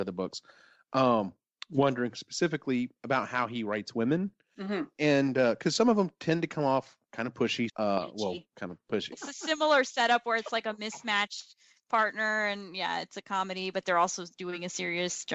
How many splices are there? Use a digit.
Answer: 2